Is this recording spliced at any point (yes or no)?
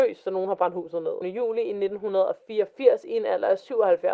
yes